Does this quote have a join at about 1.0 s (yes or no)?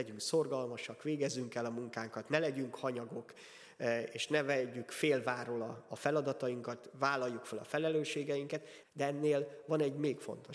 no